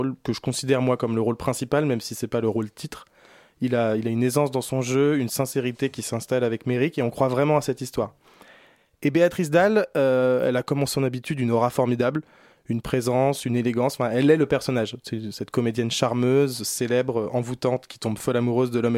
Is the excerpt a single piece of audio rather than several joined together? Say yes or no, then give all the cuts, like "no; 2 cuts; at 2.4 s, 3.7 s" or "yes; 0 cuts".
yes; 0 cuts